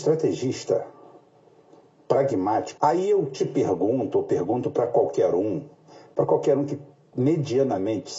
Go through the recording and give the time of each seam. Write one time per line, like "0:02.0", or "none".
0:02.8

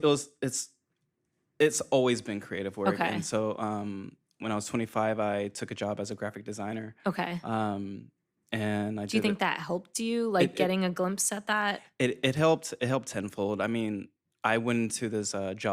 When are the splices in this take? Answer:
none

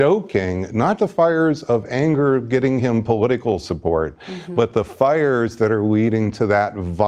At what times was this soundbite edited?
0:01.0

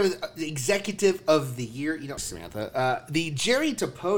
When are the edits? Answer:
0:02.2

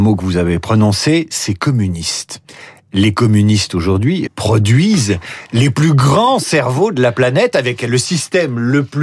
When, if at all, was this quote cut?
0:04.3

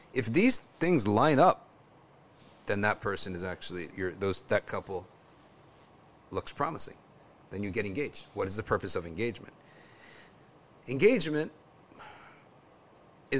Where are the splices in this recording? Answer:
0:03.9

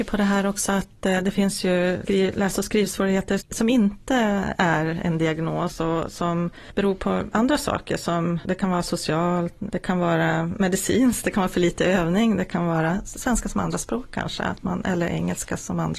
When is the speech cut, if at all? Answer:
0:09.7

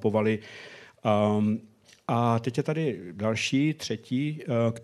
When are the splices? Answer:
none

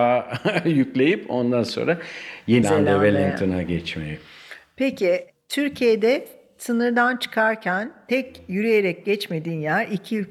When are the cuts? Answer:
0:02.6

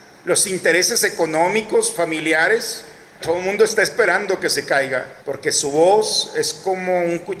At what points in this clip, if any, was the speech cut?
0:03.2
0:05.2

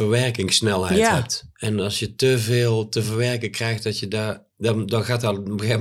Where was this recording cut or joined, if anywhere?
0:04.5

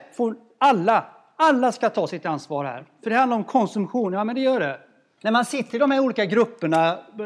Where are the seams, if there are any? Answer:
0:05.2

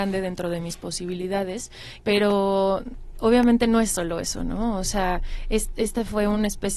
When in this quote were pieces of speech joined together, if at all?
0:02.0

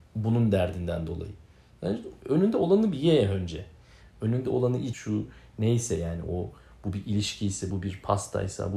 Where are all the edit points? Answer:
0:04.9
0:07.7

